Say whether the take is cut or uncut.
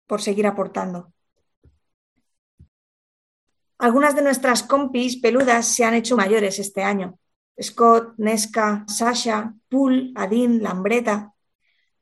cut